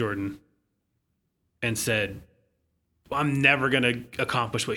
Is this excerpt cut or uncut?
uncut